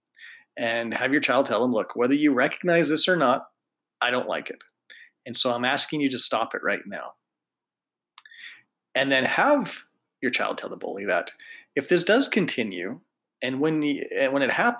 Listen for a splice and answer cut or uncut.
uncut